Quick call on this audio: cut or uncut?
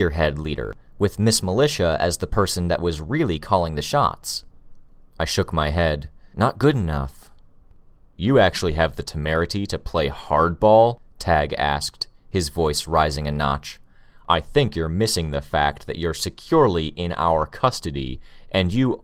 uncut